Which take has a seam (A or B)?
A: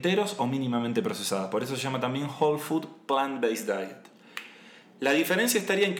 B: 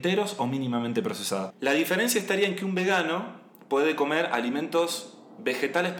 B